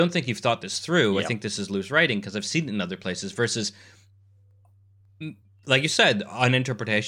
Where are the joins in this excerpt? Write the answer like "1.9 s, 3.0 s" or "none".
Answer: none